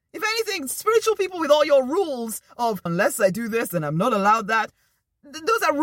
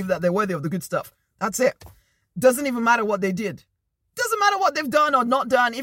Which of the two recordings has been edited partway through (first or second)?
first